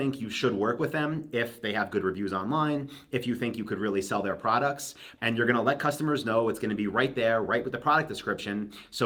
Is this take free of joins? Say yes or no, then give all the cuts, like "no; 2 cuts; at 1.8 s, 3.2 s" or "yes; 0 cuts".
no; 1 cut; at 5.2 s